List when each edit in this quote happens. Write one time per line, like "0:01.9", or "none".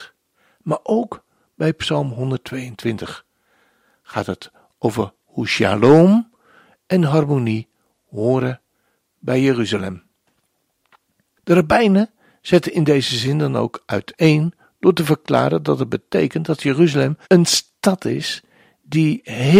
0:11.4
0:17.2

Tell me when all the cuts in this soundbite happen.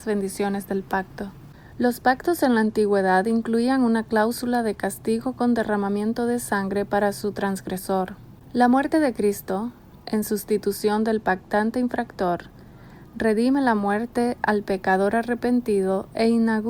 none

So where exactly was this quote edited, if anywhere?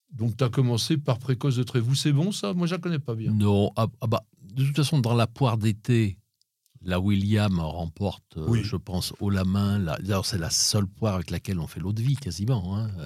none

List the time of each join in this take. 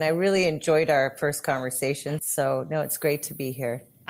0:02.2

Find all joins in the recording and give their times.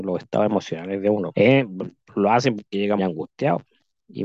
0:01.3
0:03.0

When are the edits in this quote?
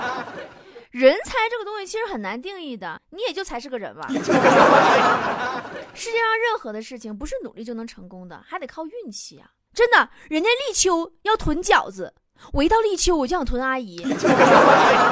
0:03.0
0:09.7

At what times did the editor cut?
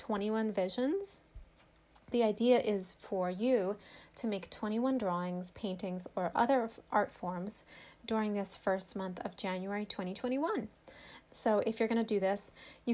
0:02.1
0:11.2

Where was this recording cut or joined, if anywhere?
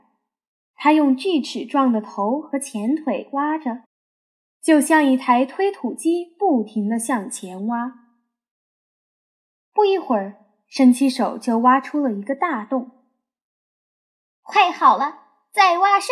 none

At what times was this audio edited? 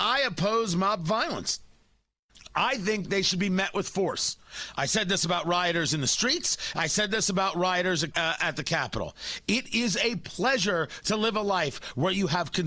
0:08.1

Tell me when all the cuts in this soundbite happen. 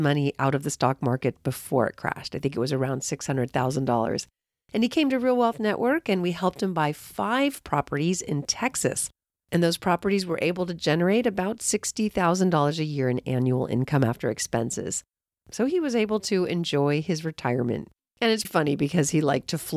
0:18.4

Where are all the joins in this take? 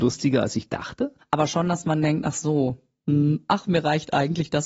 0:01.2

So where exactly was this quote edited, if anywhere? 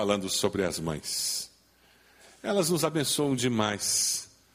none

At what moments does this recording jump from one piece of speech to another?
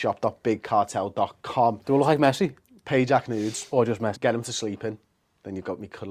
0:04.1

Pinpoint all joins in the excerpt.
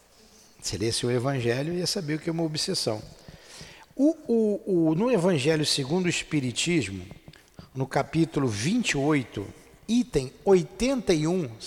none

